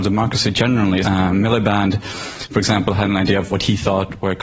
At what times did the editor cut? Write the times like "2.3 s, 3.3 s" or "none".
1.0 s, 3.5 s